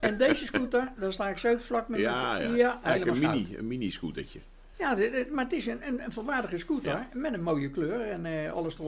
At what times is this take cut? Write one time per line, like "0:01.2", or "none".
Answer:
none